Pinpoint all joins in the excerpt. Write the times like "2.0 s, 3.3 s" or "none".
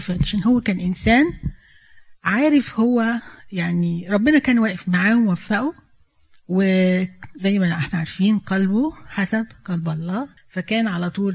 10.4 s